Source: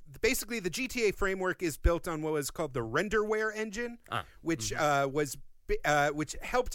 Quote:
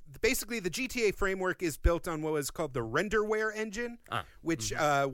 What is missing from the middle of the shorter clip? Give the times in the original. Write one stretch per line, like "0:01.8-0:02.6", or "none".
none